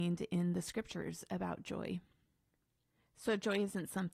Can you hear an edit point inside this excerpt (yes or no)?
no